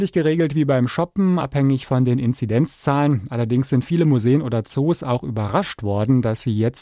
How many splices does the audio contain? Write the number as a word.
one